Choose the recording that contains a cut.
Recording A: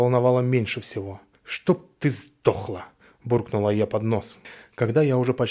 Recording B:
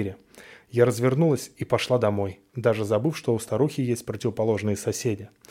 A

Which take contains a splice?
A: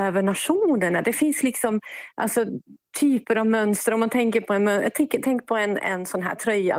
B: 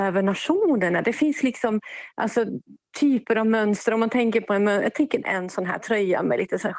B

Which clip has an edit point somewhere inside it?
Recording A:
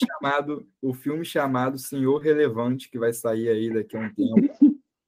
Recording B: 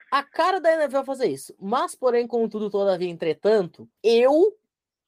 B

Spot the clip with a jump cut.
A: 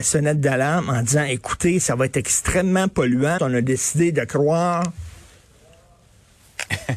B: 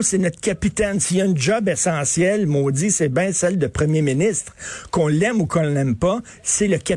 A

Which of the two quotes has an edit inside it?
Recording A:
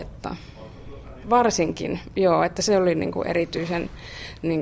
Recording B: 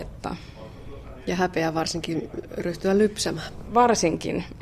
A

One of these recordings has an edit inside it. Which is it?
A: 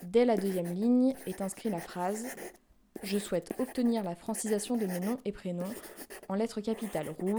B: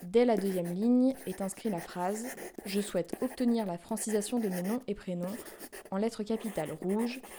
B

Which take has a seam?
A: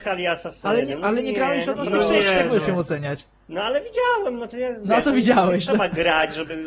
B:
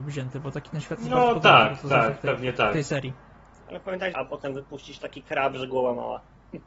B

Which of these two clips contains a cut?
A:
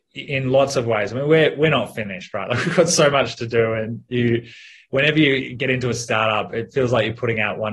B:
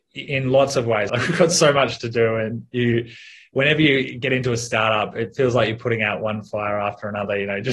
B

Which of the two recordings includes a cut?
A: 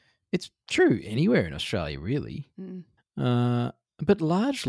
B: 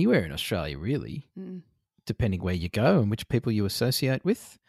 A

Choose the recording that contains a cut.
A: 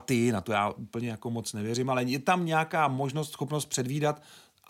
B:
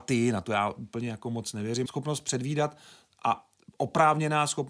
B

